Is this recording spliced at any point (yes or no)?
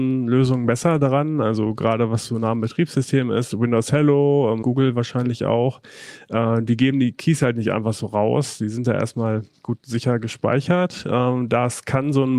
yes